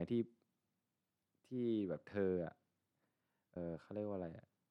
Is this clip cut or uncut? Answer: cut